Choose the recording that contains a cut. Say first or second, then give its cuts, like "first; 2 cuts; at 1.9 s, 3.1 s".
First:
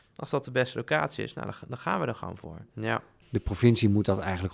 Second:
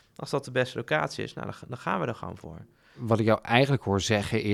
first; 1 cut; at 2.7 s